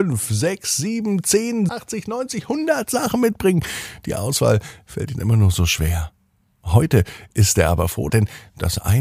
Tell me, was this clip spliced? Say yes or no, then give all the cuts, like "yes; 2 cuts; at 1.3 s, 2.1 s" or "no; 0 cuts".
yes; 2 cuts; at 1.7 s, 8.1 s